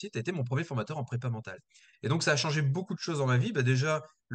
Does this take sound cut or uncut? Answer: uncut